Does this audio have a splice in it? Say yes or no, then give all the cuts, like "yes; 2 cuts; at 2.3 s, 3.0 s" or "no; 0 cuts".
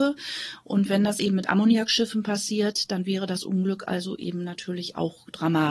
no; 0 cuts